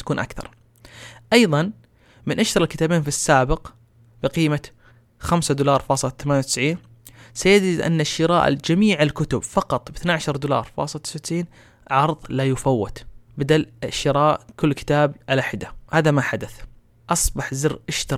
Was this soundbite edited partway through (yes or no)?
yes